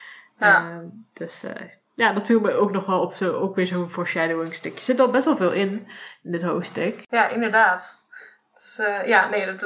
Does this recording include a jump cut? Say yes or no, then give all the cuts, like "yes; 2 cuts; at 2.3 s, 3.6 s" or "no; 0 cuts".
no; 0 cuts